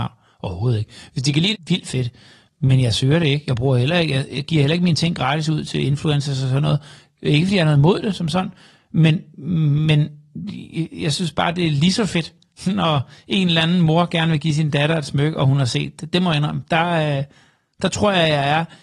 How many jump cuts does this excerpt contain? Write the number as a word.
one